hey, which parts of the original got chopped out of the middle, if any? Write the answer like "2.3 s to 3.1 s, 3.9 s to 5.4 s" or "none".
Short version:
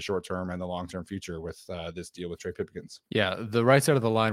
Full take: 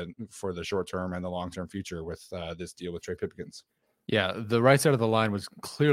3.7 s to 4.0 s